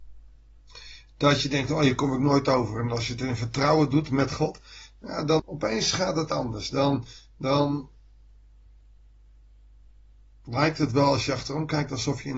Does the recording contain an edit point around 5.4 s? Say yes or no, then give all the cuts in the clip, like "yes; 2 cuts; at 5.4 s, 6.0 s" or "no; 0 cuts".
yes; 1 cut; at 5.4 s